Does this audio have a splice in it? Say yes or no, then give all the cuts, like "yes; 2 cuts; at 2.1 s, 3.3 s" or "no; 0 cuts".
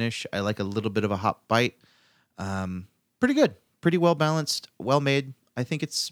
no; 0 cuts